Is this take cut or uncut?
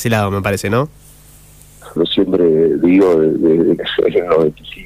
cut